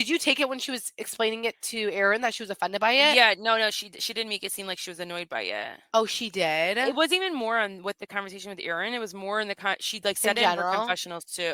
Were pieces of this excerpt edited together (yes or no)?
no